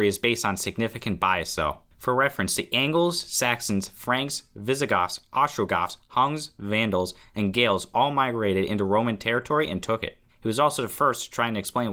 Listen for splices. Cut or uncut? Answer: cut